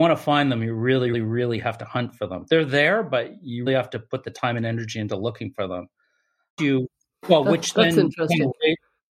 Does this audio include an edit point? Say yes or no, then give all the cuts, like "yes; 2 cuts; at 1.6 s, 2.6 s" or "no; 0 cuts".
yes; 3 cuts; at 1.1 s, 3.7 s, 6.6 s